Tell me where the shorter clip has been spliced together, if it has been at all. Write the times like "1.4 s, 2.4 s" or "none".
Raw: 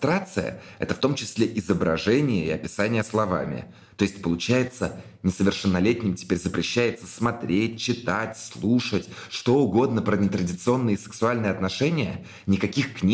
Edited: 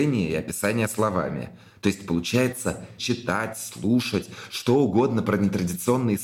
3.0 s